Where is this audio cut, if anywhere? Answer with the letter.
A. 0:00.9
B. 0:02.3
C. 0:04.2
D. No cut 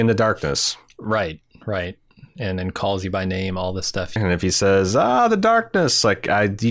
C